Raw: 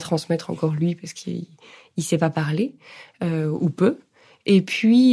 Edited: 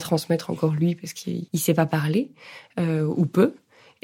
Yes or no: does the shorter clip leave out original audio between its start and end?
yes